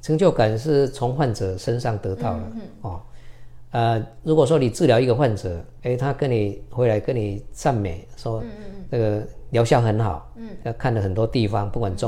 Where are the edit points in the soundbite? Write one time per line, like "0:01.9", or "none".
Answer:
0:05.8
0:10.6